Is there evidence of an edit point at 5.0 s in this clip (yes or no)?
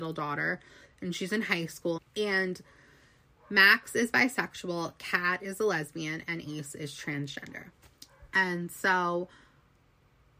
no